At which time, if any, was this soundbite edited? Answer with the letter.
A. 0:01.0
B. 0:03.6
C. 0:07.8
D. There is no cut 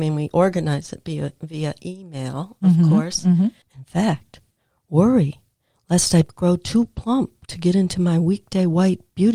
B